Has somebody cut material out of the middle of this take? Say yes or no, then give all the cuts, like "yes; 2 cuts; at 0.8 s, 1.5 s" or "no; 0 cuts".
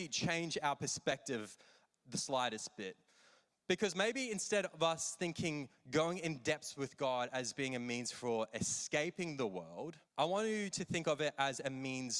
yes; 1 cut; at 10.0 s